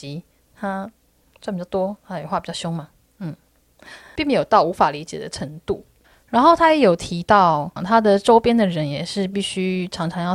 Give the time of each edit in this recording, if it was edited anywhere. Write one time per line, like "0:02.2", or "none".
0:04.2
0:07.8